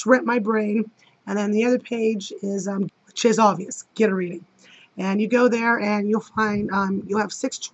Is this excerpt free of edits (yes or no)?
no